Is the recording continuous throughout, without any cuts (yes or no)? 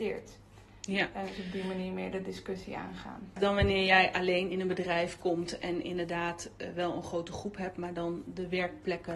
no